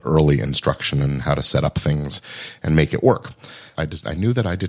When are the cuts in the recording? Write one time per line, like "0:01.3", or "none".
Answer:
0:03.8

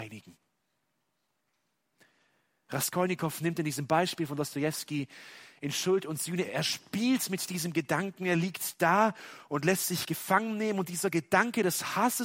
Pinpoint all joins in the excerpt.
0:06.4

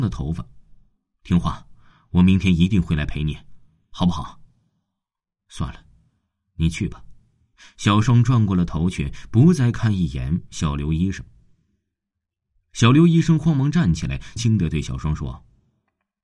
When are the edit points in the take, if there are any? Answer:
0:14.4

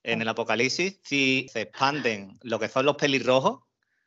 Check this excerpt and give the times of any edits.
0:01.5

